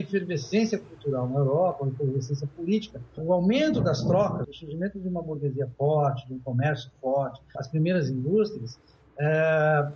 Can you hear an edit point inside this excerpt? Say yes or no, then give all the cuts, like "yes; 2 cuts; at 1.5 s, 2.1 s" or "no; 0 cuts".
yes; 3 cuts; at 3.2 s, 4.4 s, 7.5 s